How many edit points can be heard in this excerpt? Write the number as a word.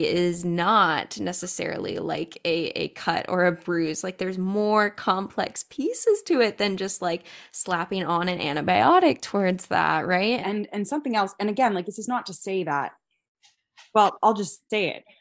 one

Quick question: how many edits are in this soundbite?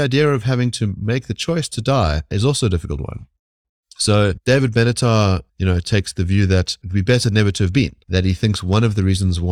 zero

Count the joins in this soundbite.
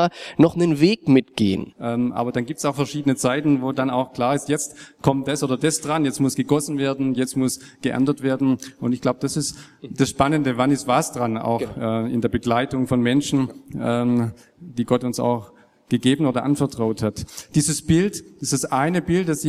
one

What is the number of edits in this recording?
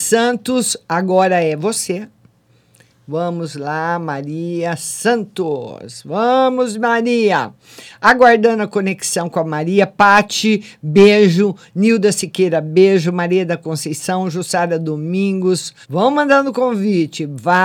one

